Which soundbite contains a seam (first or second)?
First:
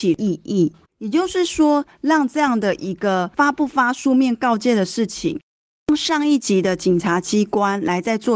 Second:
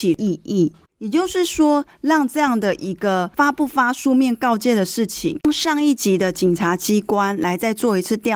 second